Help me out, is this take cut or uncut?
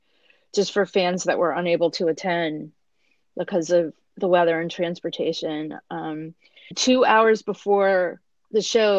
cut